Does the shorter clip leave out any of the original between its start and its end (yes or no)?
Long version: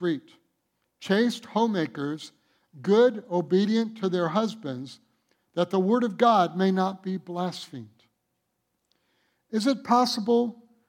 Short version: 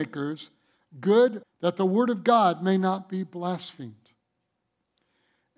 yes